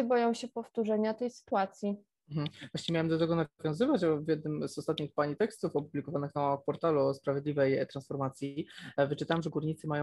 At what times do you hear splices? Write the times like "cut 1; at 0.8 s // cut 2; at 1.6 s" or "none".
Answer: none